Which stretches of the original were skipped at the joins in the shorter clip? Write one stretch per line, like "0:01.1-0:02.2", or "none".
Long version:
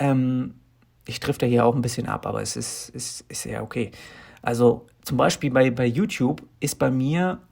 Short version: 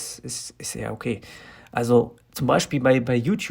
none

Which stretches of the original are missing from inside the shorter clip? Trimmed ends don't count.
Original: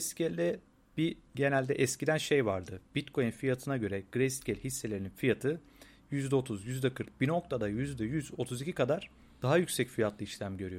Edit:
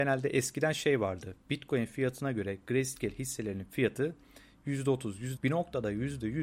0:06.8-0:07.1

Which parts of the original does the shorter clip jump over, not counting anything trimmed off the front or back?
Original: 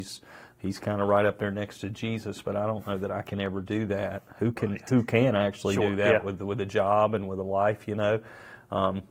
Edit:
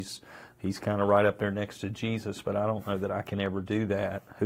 none

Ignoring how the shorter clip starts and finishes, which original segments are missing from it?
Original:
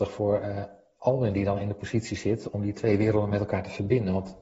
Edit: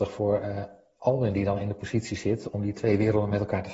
none

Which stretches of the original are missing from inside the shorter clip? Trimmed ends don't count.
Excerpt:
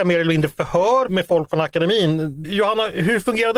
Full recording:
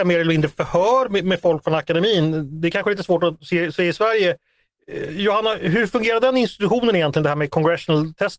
0:01.1-0:01.2
0:02.6-0:05.1

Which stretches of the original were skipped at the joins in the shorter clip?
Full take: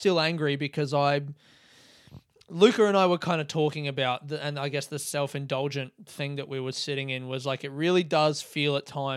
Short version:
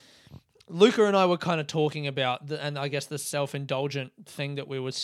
none

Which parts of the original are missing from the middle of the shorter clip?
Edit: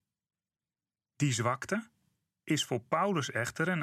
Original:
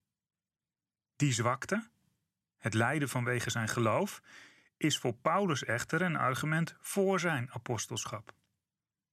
0:02.4-0:04.7

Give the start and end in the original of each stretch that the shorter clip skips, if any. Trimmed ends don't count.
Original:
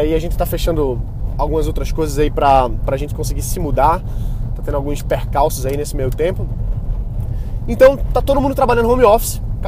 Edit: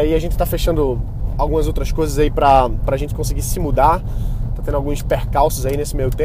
none

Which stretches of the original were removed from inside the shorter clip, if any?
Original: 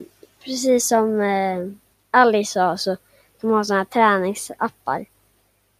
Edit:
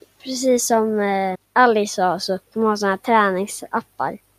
0:01.6-0:01.9
0:03.0-0:03.3

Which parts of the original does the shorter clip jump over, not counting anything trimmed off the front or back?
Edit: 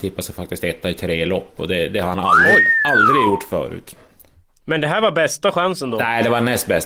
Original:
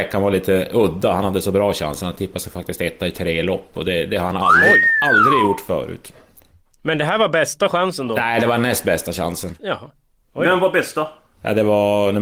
none

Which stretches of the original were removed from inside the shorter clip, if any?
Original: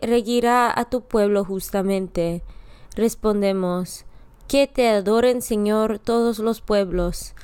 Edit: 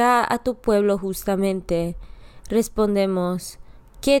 none

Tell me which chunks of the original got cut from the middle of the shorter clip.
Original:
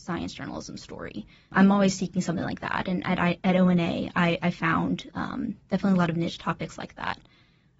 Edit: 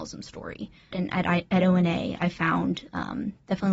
0:01.5-0:02.8
0:04.1-0:04.4

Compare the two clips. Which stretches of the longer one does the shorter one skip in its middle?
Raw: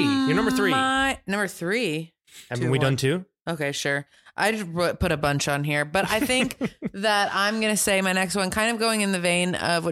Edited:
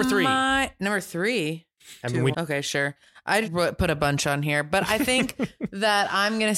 0:02.8-0:03.4
0:04.6-0:04.7

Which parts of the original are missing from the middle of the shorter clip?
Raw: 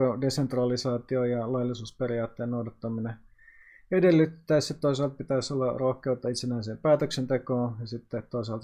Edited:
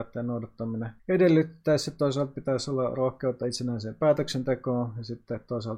0:03.2-0:03.8

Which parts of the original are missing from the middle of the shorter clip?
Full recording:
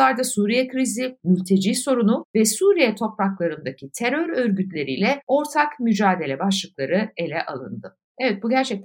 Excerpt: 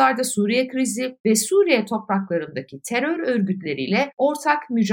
0:01.2-0:02.3

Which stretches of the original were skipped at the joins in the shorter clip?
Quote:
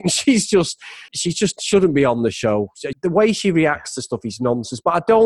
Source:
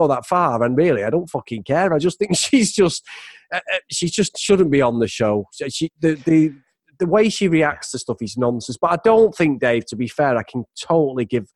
0:03.3-0:03.8
0:05.7-0:06.9

